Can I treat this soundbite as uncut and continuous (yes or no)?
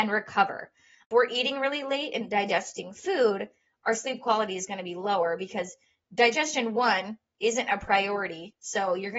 yes